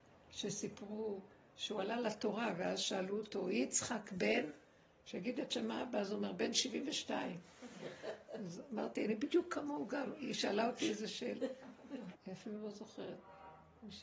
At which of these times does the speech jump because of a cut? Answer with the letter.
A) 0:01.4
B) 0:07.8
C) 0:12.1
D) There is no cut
C